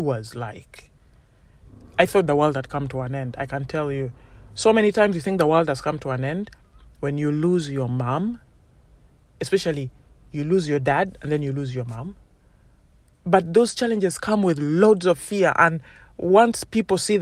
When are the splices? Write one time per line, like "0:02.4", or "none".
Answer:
0:13.1

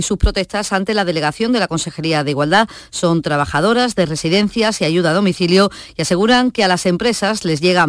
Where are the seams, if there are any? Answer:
none

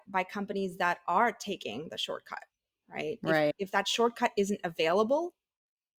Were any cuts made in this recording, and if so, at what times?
none

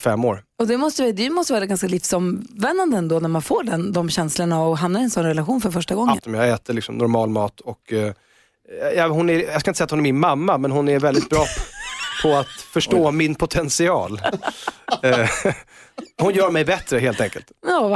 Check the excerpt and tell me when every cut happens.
0:06.2

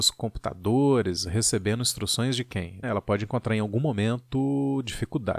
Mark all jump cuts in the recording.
0:02.8

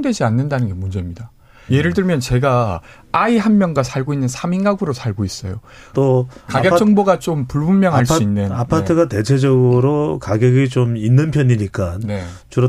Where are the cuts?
0:01.7
0:05.9

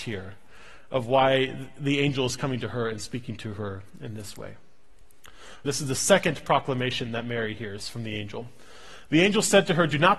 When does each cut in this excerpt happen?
0:05.7

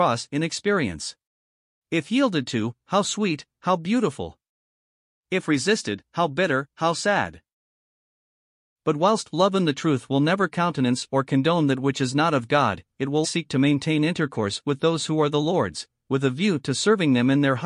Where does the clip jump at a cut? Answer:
0:01.8
0:13.2

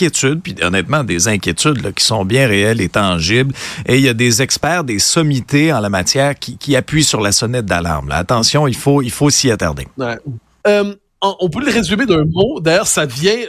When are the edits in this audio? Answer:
0:10.6

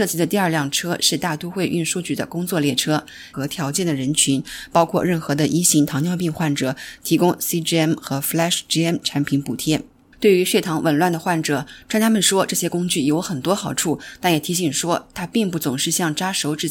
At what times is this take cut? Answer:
0:03.3
0:10.1

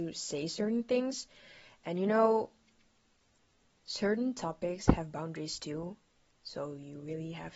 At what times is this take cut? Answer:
none

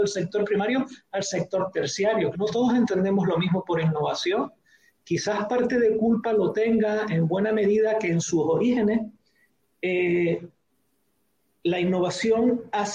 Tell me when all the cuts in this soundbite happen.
0:02.3

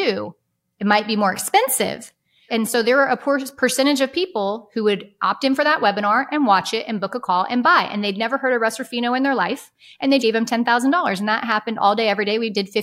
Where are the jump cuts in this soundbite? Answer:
0:02.5
0:10.2

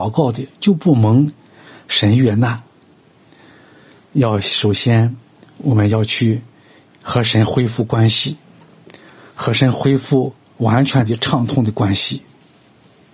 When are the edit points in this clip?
0:04.0

